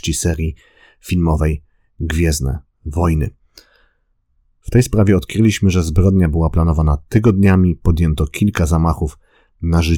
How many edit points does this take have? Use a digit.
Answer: 1